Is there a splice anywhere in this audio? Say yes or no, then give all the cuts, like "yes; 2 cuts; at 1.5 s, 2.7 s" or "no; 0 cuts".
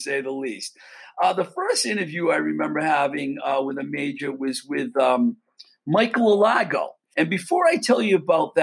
yes; 1 cut; at 7.1 s